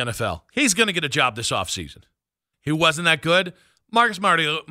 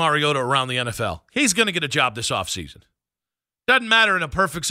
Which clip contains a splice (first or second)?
first